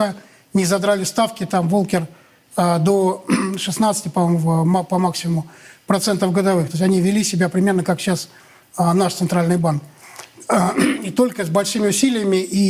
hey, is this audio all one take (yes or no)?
yes